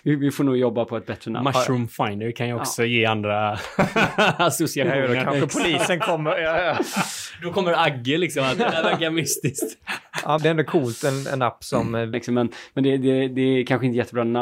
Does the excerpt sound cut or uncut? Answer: cut